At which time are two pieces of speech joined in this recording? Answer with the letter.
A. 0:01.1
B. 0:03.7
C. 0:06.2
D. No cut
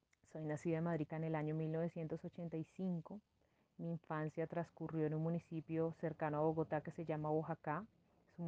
A